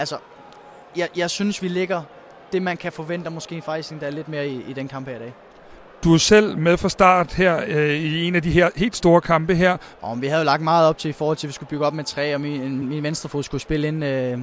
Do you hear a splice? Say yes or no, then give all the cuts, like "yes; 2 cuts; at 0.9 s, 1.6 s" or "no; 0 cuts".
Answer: yes; 2 cuts; at 10.0 s, 12.8 s